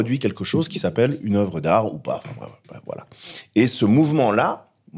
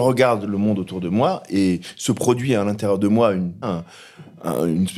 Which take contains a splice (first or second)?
second